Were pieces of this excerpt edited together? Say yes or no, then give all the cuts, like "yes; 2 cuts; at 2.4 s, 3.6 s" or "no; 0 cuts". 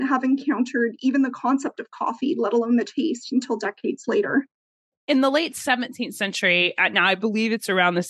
no; 0 cuts